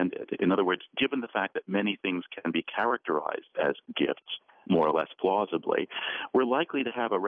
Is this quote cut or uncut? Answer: uncut